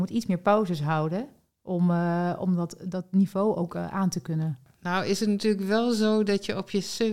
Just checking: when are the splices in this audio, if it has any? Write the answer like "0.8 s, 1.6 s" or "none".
none